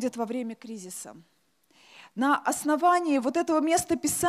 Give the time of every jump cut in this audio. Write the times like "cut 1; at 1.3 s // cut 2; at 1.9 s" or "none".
none